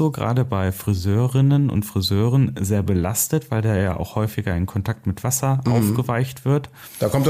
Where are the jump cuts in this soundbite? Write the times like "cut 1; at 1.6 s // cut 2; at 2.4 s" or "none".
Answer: none